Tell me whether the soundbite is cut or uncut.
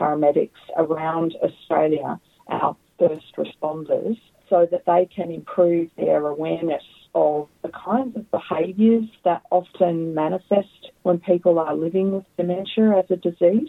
cut